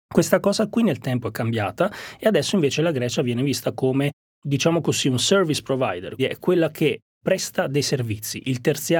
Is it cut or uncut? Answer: cut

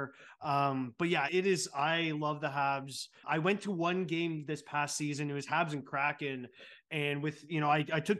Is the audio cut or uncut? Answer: cut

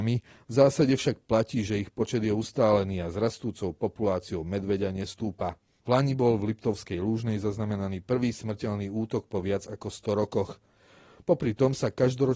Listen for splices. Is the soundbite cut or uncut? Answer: uncut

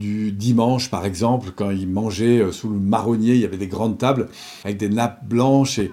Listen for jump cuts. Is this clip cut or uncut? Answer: uncut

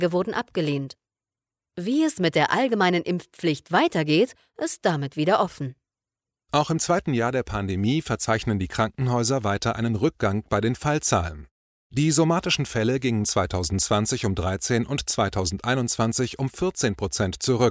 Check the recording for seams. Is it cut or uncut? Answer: uncut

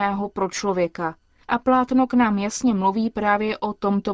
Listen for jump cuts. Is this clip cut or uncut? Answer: cut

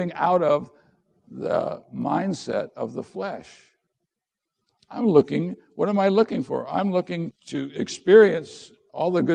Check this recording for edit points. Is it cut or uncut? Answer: cut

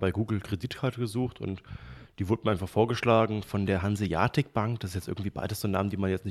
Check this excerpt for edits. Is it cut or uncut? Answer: uncut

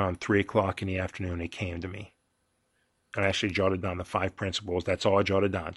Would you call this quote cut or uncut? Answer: uncut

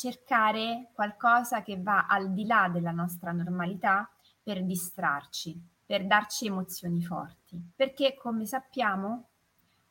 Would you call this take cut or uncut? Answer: cut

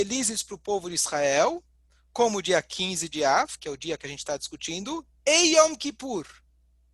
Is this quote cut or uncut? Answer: uncut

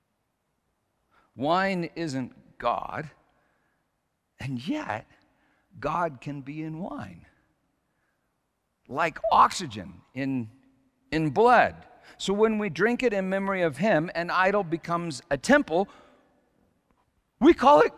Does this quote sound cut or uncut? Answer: uncut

